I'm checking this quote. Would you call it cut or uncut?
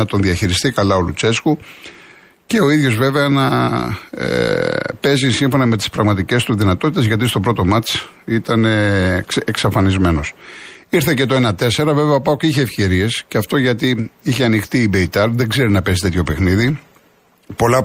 uncut